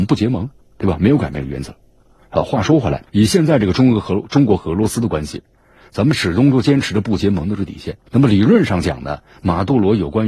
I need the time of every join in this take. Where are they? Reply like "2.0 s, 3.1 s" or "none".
3.1 s, 8.1 s